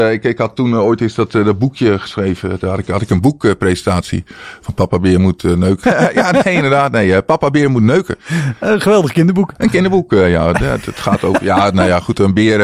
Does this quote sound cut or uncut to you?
cut